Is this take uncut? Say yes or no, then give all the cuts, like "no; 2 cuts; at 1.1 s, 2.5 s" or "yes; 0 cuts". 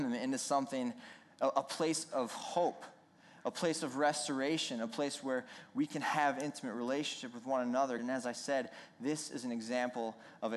no; 1 cut; at 8.0 s